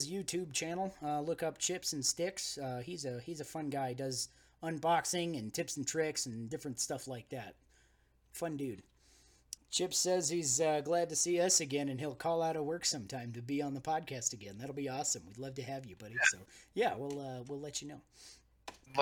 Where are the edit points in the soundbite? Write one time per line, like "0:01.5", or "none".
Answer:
0:09.6

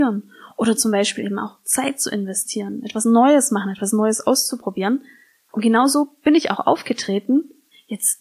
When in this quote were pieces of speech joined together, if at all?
0:05.5

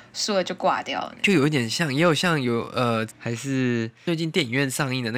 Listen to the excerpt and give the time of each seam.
0:03.1

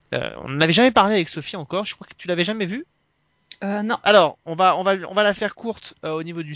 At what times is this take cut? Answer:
0:04.0

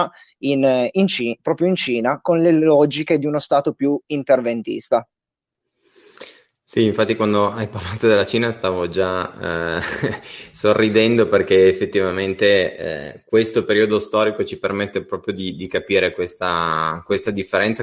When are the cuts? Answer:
none

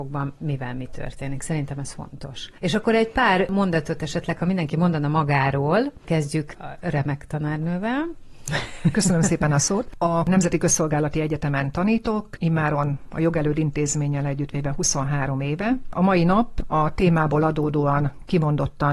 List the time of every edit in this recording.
none

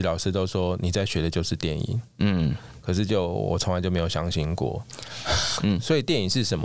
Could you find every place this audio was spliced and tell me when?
0:05.6

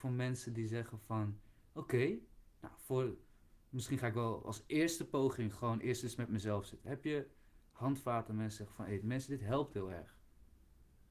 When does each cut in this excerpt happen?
none

